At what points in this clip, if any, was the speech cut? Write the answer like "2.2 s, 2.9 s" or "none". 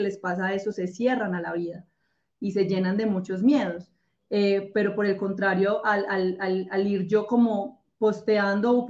none